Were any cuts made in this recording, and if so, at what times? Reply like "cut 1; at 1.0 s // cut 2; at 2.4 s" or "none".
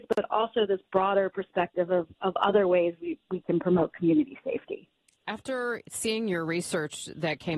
none

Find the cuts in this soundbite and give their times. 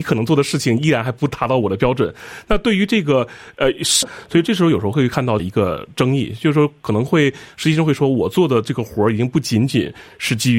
cut 1; at 4.0 s // cut 2; at 5.4 s

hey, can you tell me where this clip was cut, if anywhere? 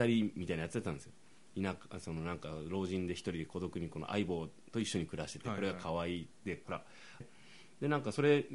cut 1; at 7.2 s

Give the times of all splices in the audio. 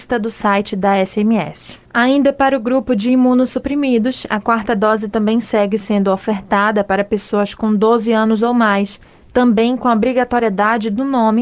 cut 1; at 1.9 s

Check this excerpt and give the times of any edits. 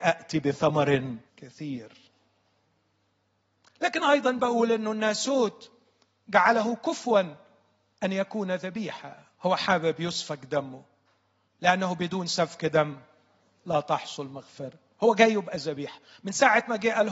cut 1; at 1.3 s // cut 2; at 9.3 s

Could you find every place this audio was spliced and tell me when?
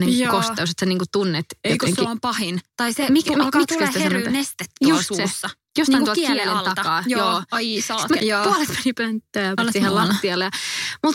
cut 1; at 8.2 s // cut 2; at 9.6 s

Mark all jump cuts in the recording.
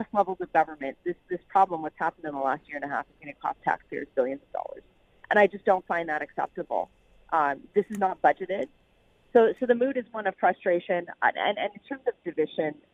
none

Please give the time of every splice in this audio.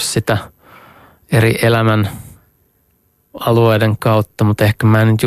none

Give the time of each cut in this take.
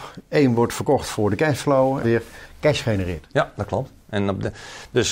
cut 1; at 2.0 s

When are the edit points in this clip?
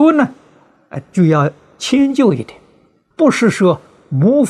cut 1; at 3.1 s

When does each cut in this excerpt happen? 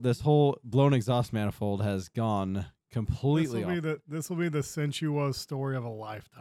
none

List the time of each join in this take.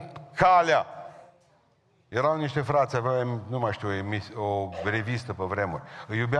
none

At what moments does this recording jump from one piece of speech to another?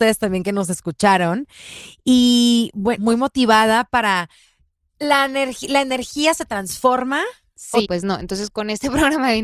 cut 1; at 3.0 s // cut 2; at 7.8 s

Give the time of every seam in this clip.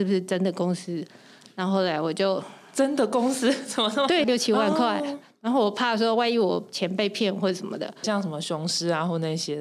cut 1; at 4.2 s // cut 2; at 8.0 s

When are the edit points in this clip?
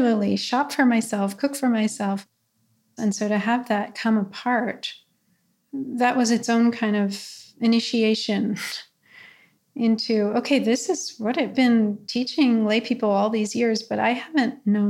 cut 1; at 3.0 s

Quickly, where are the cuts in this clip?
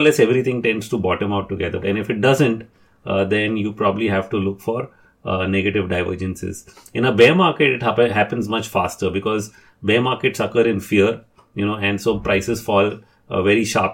cut 1; at 1.8 s

